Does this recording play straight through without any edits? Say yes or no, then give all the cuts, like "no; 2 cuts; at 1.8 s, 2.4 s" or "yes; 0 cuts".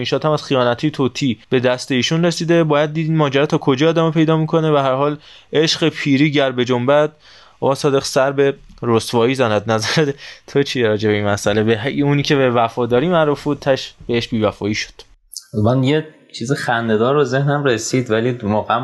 no; 1 cut; at 1.4 s